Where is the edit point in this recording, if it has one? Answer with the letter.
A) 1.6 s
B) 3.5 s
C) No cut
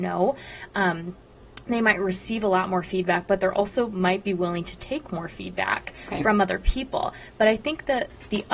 C